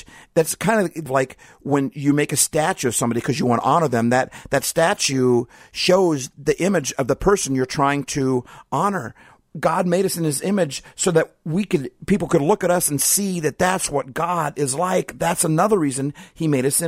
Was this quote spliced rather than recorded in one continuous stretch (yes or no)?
no